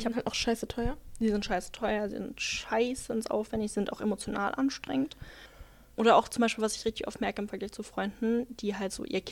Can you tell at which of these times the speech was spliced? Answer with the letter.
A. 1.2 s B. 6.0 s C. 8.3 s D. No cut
D